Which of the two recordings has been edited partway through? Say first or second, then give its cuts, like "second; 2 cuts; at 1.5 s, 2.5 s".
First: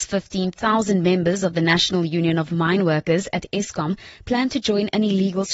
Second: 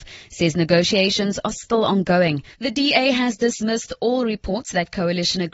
second; 1 cut; at 2.5 s